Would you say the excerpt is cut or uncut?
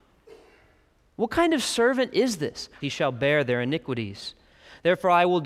cut